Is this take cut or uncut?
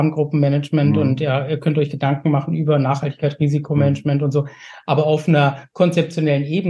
uncut